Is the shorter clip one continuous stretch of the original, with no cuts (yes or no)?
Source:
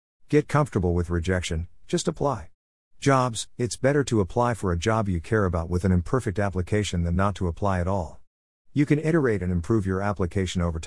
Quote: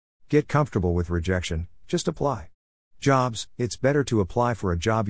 yes